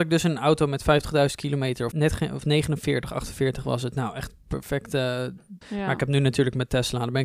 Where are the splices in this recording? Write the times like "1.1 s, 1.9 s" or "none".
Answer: 1.9 s, 5.6 s